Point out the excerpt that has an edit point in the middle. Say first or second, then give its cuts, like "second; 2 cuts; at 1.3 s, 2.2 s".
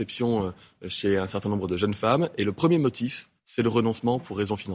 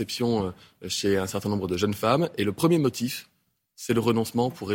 first; 1 cut; at 3.4 s